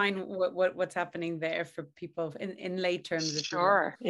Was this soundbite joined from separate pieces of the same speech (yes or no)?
no